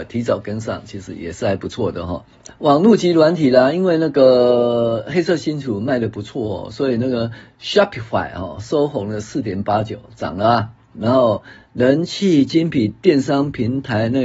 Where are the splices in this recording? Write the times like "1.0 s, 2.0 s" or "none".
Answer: 2.5 s, 10.9 s